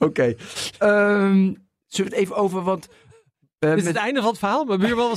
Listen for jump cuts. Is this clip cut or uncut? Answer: uncut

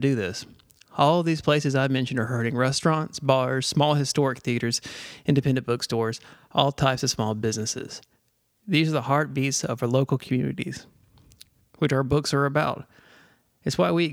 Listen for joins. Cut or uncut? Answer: uncut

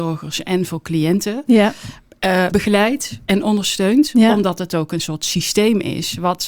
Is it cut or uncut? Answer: cut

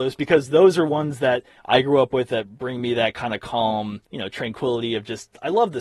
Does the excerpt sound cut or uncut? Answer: cut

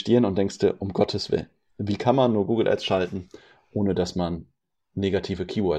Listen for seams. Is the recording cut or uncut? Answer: uncut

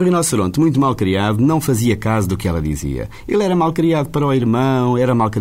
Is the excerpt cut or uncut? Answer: uncut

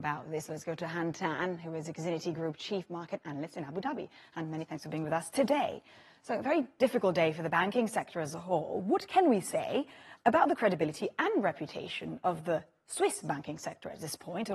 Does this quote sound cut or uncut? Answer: uncut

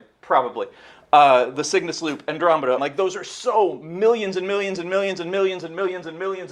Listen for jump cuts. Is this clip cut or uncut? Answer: cut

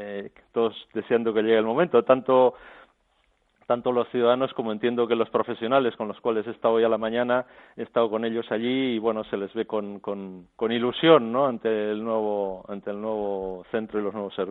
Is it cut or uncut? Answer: uncut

